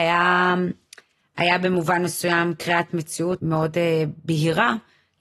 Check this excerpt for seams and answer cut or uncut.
cut